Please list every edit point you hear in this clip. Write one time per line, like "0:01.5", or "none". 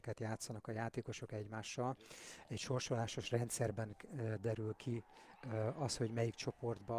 none